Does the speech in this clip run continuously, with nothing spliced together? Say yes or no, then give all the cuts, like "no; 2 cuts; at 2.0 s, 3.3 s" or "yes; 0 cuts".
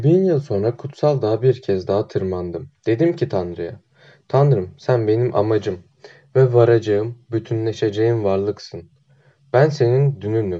yes; 0 cuts